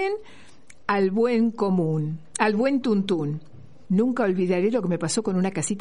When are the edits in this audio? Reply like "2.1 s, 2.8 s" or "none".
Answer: 3.9 s